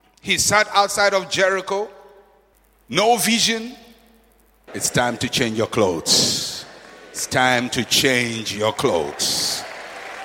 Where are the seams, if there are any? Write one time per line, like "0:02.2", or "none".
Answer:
0:04.7